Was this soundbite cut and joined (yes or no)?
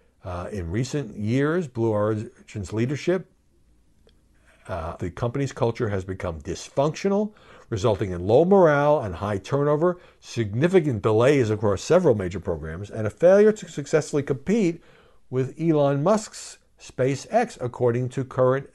yes